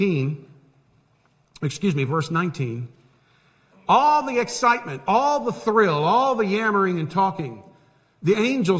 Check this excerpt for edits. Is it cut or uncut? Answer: uncut